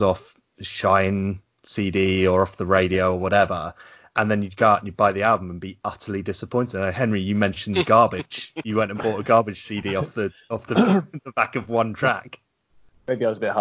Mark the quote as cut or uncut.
uncut